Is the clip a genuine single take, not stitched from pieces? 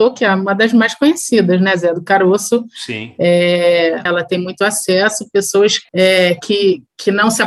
no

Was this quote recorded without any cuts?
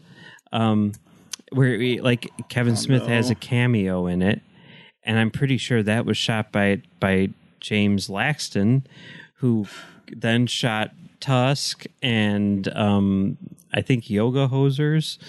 yes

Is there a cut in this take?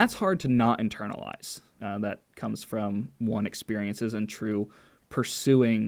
yes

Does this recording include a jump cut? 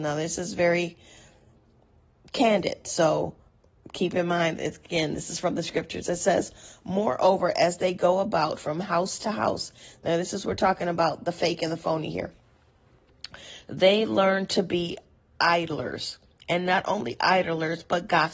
no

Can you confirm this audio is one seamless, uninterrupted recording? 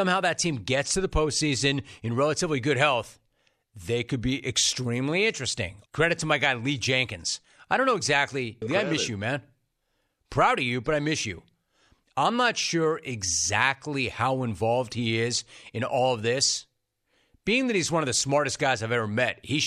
no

